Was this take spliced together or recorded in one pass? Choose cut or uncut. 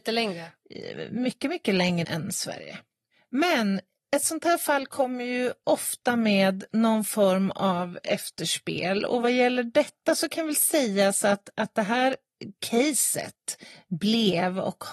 cut